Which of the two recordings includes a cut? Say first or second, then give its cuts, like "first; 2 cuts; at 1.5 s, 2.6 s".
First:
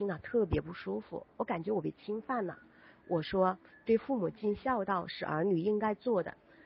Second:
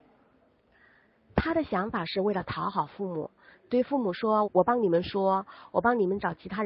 second; 1 cut; at 4.4 s